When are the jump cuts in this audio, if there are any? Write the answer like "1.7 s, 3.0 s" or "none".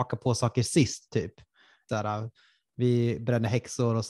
1.9 s